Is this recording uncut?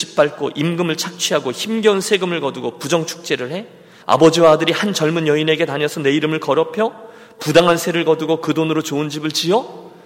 no; 1 cut; at 4.0 s

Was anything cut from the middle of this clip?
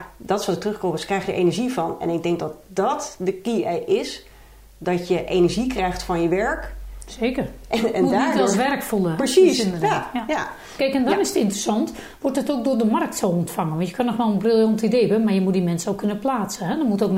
yes; 1 cut; at 10.8 s

